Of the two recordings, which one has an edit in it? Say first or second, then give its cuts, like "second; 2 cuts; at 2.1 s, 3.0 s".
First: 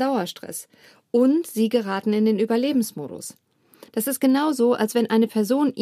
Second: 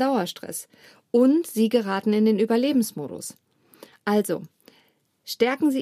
first; 1 cut; at 3.9 s